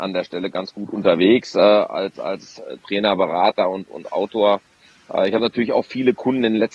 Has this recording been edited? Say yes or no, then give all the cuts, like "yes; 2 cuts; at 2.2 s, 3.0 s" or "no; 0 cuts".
no; 0 cuts